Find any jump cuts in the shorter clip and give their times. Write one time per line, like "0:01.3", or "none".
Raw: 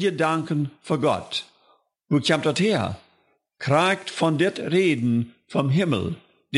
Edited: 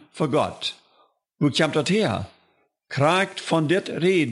none